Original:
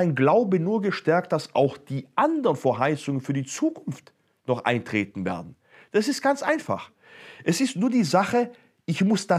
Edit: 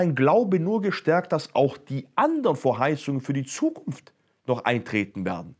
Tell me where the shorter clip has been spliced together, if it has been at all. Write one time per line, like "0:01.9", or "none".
none